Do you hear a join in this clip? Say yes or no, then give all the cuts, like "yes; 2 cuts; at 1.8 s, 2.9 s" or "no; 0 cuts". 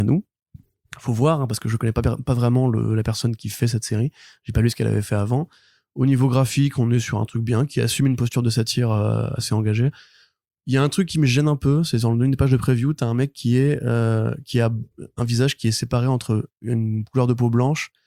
no; 0 cuts